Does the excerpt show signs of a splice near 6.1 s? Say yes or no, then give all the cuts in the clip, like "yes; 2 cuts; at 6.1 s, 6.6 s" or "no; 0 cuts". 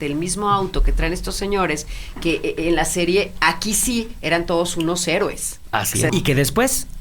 yes; 1 cut; at 6.1 s